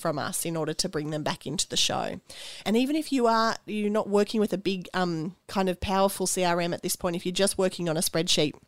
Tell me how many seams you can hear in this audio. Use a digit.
2